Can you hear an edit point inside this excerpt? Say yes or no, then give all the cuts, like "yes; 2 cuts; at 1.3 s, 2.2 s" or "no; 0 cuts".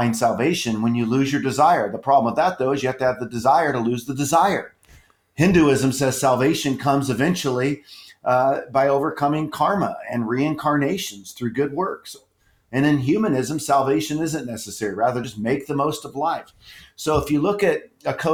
no; 0 cuts